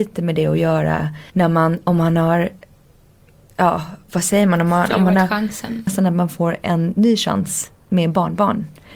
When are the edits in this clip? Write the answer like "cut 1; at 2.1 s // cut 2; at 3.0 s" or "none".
cut 1; at 1.3 s // cut 2; at 5.9 s